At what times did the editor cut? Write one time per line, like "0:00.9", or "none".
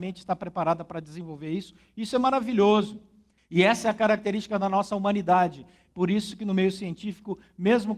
0:03.4
0:05.9